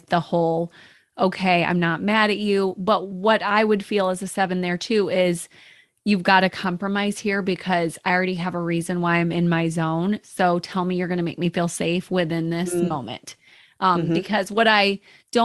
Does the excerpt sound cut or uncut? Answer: uncut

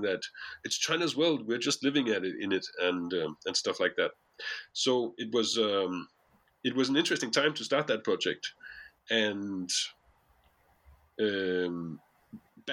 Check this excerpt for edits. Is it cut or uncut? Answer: uncut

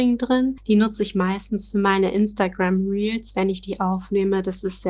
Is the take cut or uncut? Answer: uncut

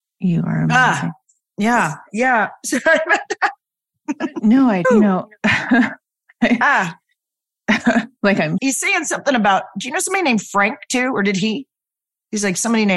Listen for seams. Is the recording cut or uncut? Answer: cut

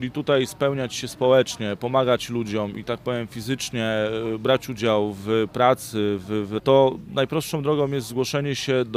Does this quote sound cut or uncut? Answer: cut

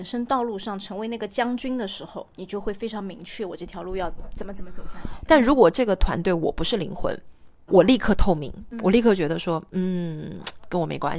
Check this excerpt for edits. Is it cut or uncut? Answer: cut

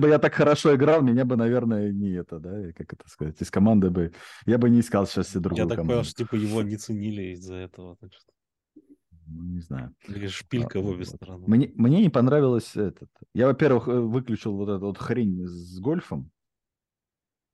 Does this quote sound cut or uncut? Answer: uncut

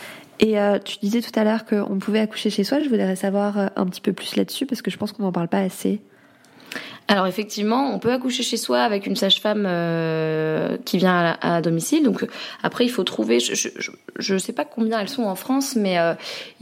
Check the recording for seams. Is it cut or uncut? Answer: uncut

